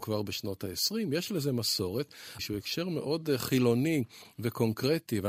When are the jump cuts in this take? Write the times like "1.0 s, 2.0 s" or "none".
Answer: 2.4 s